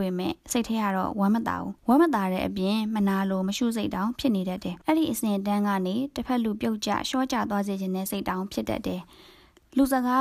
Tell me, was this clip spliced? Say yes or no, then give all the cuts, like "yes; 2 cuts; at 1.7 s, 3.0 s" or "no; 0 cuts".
yes; 2 cuts; at 1.8 s, 4.8 s